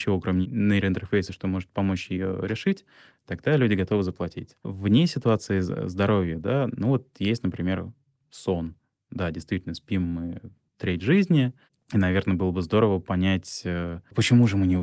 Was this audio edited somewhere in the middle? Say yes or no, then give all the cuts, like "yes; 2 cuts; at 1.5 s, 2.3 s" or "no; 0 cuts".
no; 0 cuts